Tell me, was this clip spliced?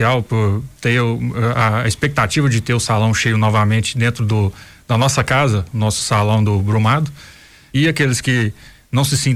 yes; 1 cut; at 7.7 s

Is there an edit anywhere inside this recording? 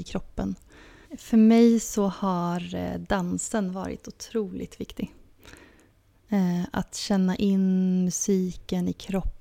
yes; 1 cut; at 1.0 s

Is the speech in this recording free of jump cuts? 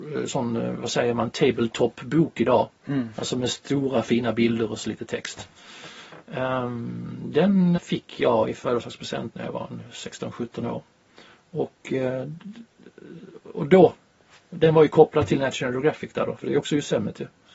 no; 1 cut; at 7.8 s

